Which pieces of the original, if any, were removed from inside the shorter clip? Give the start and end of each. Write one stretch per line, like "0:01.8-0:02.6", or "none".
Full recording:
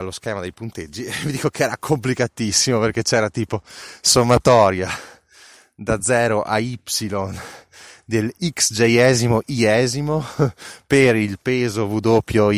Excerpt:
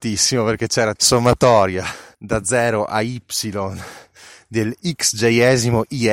0:03.3-0:04.0
0:05.2-0:05.7

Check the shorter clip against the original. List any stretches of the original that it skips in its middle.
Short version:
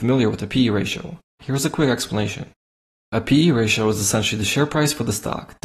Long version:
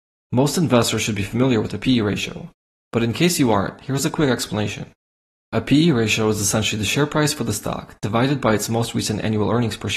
0:02.7-0:03.8

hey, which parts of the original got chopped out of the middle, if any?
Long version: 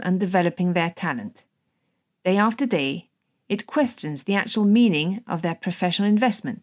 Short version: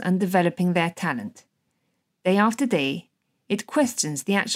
none

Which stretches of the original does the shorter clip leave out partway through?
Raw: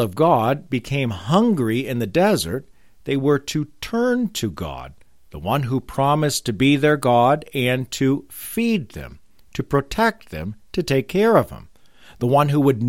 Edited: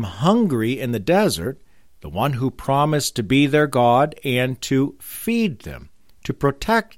0:02.9-0:05.2

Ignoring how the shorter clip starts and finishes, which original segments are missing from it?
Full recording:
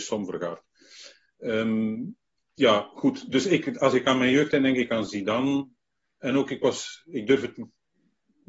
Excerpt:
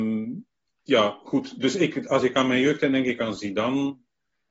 none

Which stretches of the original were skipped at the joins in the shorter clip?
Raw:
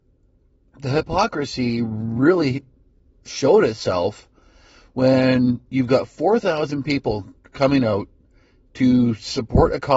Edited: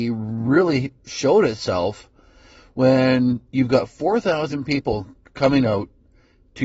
0:02.7-0:03.2

